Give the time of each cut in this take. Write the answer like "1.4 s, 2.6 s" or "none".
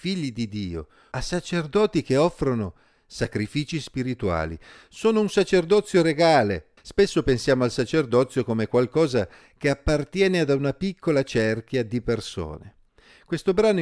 1.1 s, 6.8 s